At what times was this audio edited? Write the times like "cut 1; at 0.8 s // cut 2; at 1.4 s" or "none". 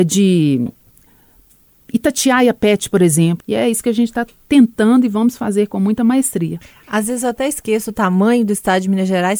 cut 1; at 3.4 s